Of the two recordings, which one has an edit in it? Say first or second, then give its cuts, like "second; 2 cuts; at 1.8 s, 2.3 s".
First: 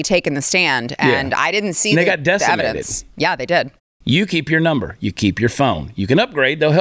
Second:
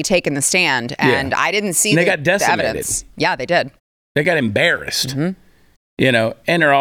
first; 1 cut; at 4.0 s